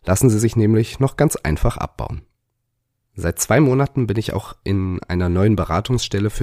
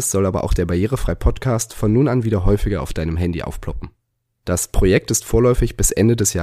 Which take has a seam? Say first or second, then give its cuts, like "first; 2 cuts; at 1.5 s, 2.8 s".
second; 1 cut; at 4.3 s